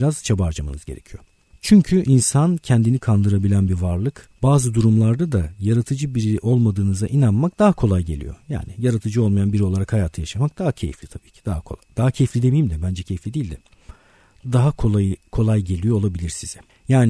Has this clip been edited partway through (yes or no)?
no